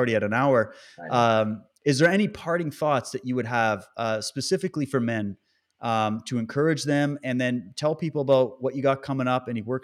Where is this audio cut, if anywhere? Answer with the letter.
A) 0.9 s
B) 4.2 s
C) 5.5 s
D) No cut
D